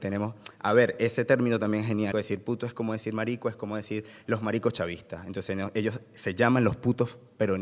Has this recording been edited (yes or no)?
yes